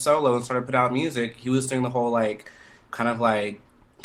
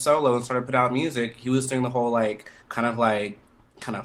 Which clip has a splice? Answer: second; 1 cut; at 2.6 s

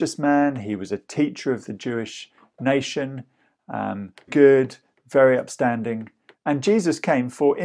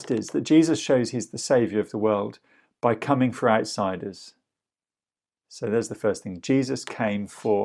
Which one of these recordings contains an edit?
first; 2 cuts; at 4.3 s, 6.3 s

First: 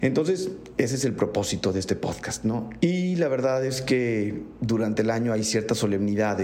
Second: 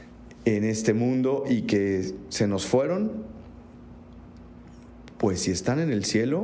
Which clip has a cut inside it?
first; 1 cut; at 2.8 s

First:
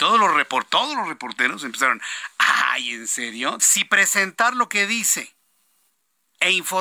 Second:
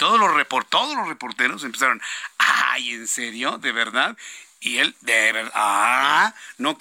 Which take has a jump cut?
first; 1 cut; at 3.6 s

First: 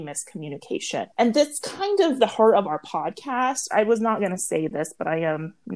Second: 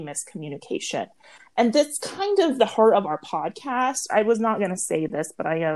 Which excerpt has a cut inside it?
first; 1 cut; at 1.1 s

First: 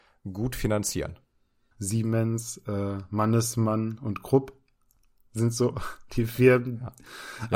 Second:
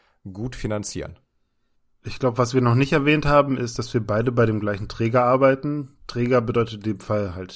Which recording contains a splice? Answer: first; 1 cut; at 1.7 s

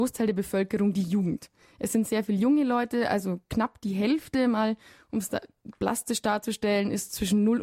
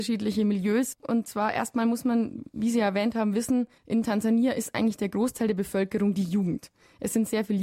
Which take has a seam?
second; 1 cut; at 3.8 s

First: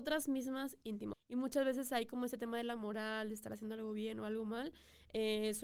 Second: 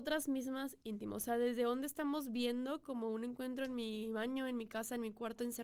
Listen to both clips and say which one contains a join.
first; 1 cut; at 1.1 s

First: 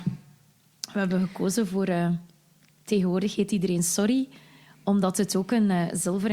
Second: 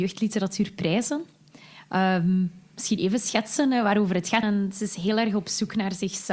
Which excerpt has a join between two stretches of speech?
second; 1 cut; at 4.4 s

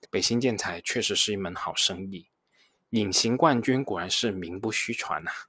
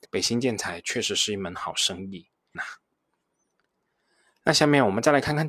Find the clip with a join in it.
second; 1 cut; at 2.5 s

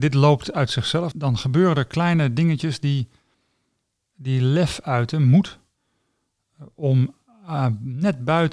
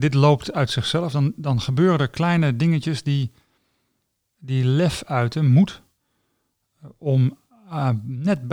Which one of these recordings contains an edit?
first; 1 cut; at 1.1 s

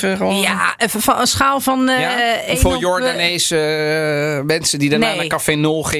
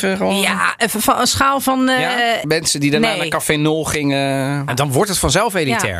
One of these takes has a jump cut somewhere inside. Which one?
second; 2 cuts; at 2.4 s, 4.7 s

